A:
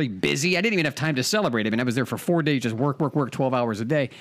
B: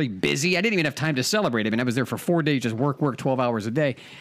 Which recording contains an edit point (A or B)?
B